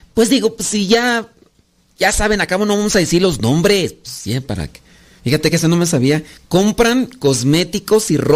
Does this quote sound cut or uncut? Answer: uncut